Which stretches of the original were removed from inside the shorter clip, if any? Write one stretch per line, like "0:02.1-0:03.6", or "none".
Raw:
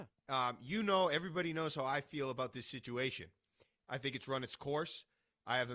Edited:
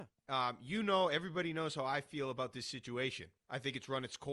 0:03.4-0:03.8